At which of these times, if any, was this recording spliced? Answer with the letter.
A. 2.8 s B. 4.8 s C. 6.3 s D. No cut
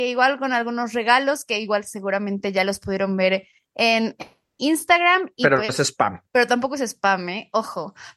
C